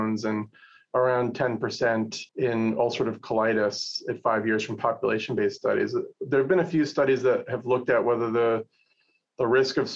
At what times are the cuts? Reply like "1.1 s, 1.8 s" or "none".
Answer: 2.3 s